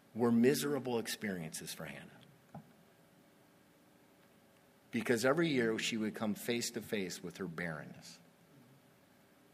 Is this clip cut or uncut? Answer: uncut